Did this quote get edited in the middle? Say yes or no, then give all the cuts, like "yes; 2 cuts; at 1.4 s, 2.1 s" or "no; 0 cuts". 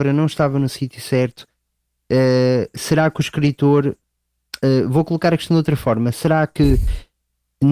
no; 0 cuts